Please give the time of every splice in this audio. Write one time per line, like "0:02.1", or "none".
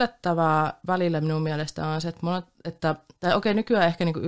none